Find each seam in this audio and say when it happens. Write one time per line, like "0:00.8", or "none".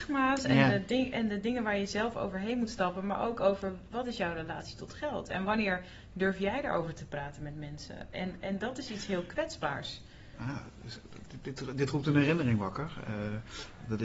none